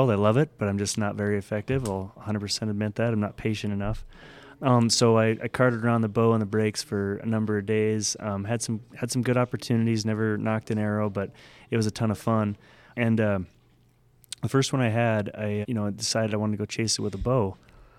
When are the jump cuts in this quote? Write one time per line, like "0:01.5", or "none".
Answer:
0:12.9
0:15.6